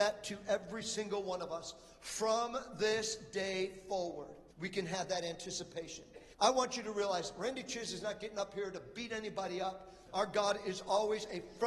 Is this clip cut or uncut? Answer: cut